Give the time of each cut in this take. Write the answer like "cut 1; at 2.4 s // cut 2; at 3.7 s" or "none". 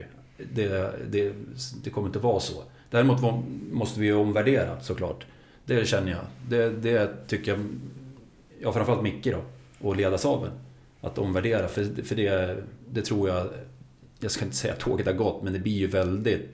none